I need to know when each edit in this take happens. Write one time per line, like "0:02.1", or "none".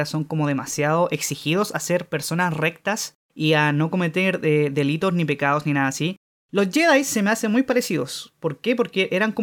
0:03.2